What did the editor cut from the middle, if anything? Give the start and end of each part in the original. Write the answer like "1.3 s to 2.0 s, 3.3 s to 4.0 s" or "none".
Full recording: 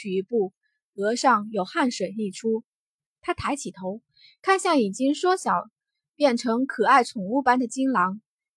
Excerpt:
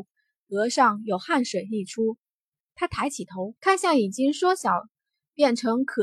4.0 s to 4.4 s